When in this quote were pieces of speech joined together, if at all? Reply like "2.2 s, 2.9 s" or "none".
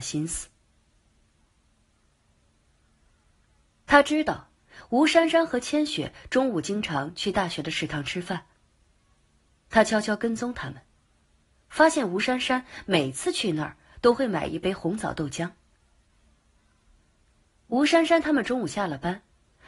none